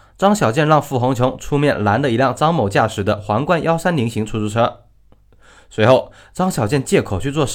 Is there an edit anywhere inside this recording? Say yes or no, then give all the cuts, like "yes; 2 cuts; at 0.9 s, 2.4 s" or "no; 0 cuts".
no; 0 cuts